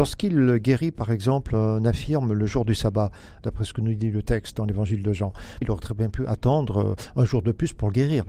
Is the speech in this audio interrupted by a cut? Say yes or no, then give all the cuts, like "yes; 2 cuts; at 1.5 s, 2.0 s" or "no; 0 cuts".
yes; 2 cuts; at 3.4 s, 5.6 s